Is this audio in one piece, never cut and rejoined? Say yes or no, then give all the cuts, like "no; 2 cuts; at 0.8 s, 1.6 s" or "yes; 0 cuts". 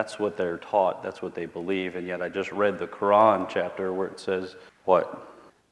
yes; 0 cuts